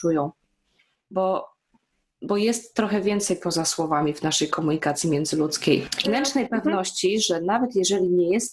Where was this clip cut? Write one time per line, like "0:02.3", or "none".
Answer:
0:06.0